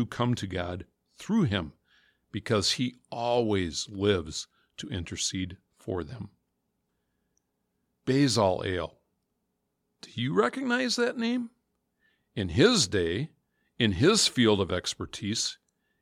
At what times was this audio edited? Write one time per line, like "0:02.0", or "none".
none